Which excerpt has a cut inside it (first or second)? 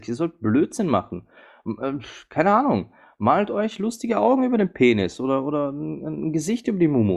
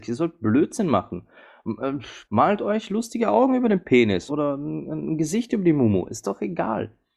second